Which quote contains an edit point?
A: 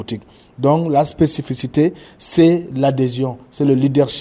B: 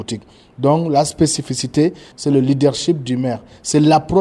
B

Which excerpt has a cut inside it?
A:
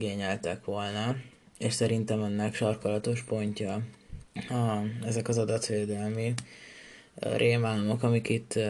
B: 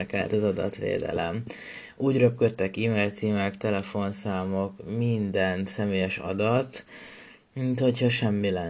A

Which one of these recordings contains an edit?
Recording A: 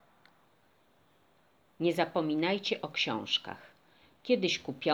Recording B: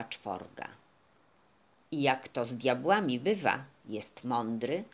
B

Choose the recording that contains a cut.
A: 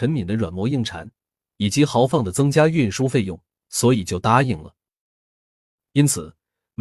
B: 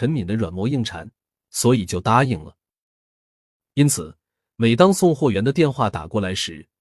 B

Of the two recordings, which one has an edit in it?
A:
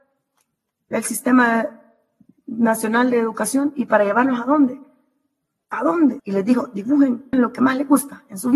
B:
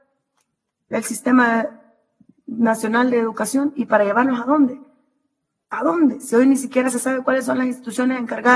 A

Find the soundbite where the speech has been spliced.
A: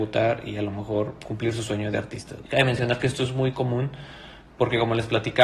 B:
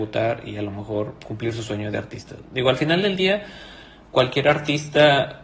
A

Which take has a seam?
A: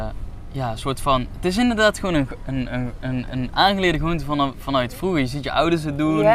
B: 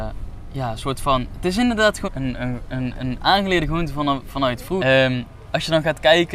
B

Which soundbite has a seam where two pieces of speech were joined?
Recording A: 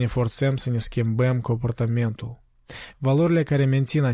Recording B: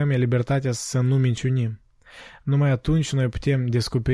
A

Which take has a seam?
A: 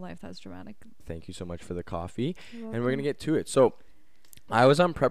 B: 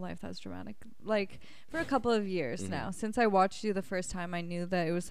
A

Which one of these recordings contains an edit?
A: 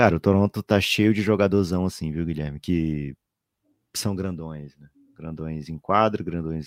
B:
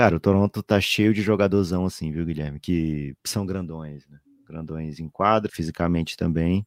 B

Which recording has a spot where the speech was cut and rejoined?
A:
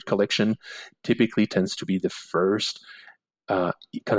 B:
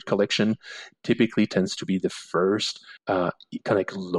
B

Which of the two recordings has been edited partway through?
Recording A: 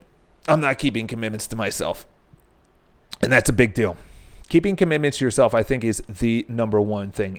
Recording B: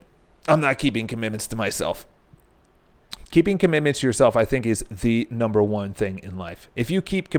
B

